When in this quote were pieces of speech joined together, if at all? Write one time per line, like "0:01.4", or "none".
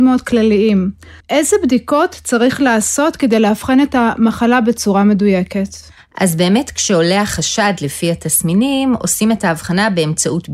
0:01.2